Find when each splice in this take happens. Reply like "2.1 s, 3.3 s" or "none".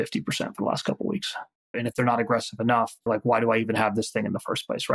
1.7 s, 3.1 s